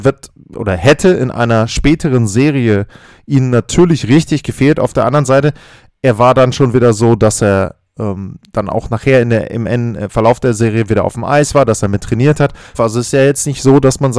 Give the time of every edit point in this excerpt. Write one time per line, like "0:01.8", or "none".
0:12.7